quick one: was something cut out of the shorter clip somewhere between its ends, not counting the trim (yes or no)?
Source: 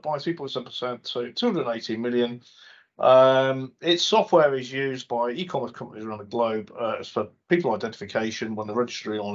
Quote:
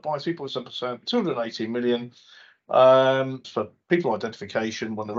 yes